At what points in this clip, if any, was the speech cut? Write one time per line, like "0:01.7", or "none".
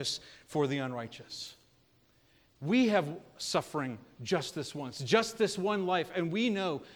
0:02.5